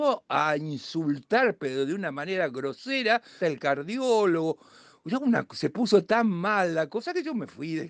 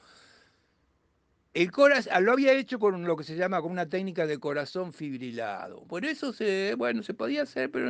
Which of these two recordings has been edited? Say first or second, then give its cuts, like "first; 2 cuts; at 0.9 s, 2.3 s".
first; 1 cut; at 3.4 s